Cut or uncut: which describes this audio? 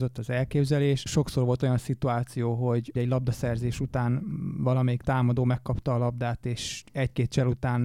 uncut